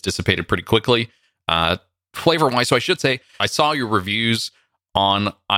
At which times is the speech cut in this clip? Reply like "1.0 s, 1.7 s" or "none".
none